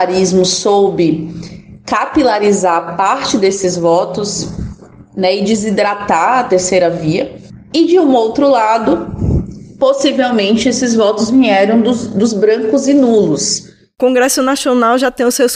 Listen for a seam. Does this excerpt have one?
no; 0 cuts

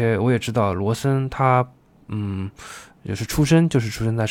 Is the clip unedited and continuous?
yes; 0 cuts

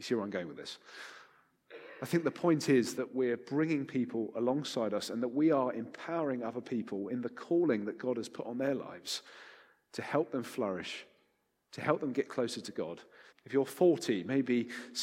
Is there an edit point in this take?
yes; 2 cuts; at 2.9 s, 13.3 s

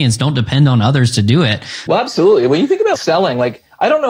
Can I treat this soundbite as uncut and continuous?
no; 2 cuts; at 1.9 s, 3.0 s

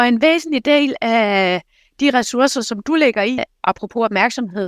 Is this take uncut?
no; 1 cut; at 3.4 s

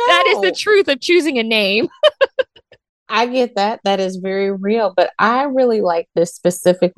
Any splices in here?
no; 0 cuts

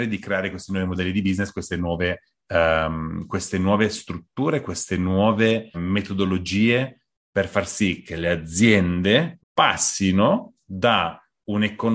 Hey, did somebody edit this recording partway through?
yes; 2 cuts; at 5.7 s, 9.4 s

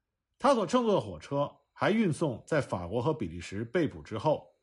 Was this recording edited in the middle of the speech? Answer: no; 0 cuts

